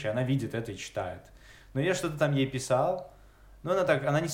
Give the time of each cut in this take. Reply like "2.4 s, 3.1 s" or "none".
none